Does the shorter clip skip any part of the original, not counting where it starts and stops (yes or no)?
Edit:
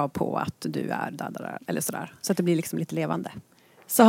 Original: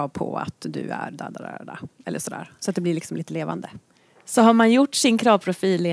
yes